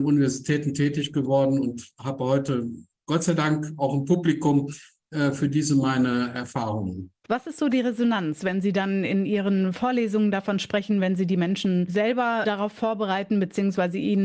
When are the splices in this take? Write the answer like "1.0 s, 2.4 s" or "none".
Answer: 7.3 s

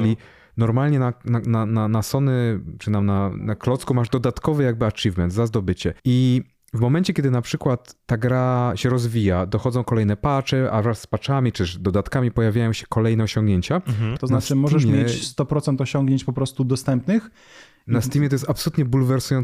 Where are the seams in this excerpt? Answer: 6.0 s, 14.2 s

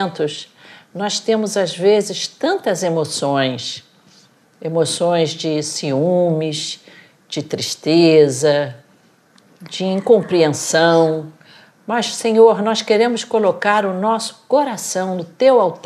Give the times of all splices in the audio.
none

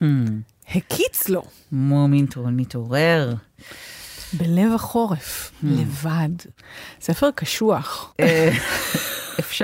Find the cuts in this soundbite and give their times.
none

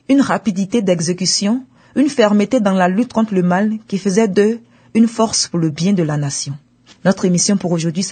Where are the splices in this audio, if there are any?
none

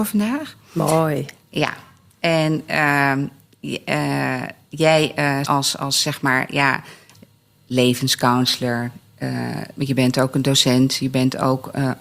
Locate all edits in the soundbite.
5.4 s

